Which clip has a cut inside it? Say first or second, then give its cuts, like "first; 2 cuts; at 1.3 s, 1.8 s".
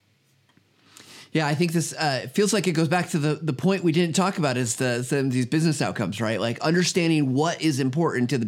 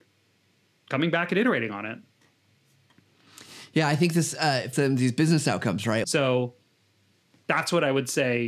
second; 2 cuts; at 4.7 s, 6.0 s